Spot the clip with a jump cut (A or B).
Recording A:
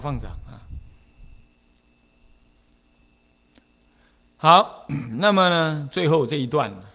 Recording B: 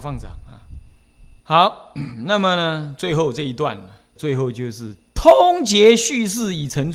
B